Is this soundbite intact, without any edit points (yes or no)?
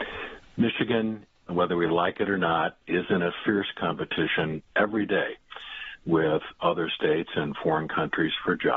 yes